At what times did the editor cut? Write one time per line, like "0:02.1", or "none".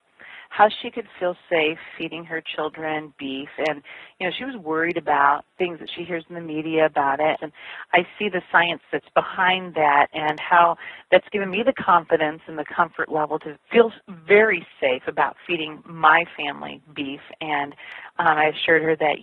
0:07.4